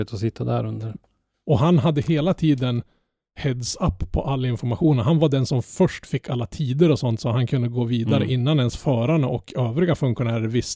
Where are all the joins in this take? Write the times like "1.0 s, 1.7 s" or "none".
0.9 s